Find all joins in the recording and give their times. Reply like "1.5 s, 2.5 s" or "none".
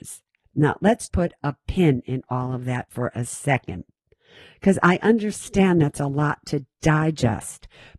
1.1 s